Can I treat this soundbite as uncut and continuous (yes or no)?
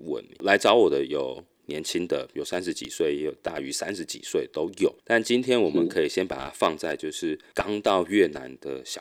no